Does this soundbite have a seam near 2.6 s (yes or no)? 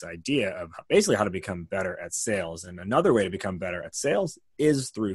no